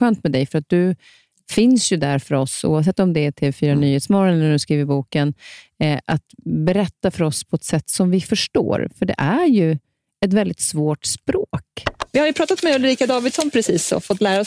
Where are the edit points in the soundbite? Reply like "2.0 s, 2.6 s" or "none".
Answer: none

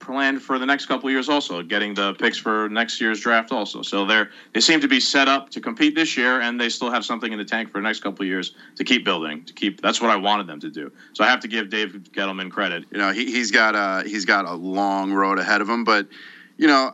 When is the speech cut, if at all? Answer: 12.8 s

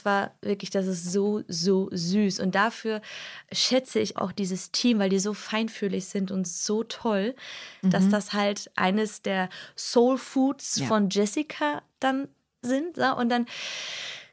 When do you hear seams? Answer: 4.2 s, 7.8 s

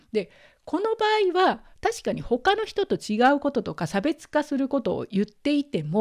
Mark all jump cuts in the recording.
1.7 s

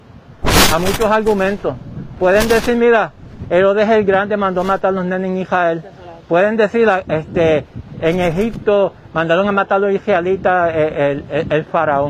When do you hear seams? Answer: none

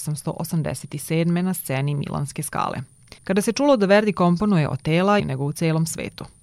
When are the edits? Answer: 3.2 s, 5.2 s

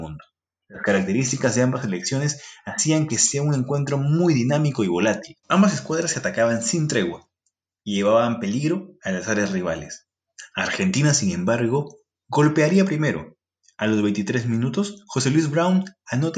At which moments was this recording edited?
5.4 s

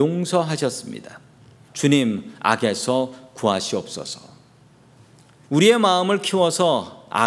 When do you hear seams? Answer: 1.7 s, 5.4 s

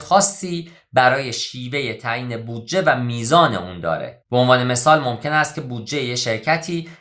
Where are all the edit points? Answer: 4.2 s

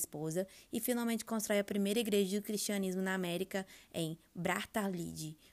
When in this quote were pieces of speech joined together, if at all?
none

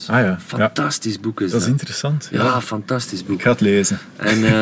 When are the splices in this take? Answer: none

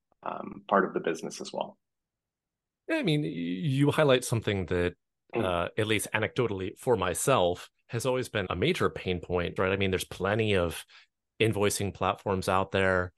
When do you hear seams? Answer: 8.5 s, 9.6 s

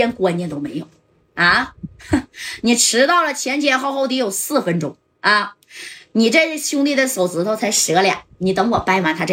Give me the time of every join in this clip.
none

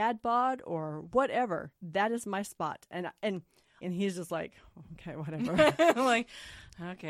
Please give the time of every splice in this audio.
1.8 s, 3.8 s

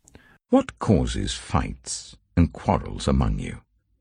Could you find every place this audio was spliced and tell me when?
none

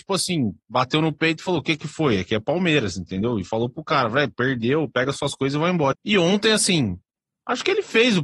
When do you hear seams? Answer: 5.9 s

